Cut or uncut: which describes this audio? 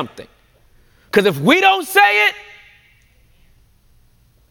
uncut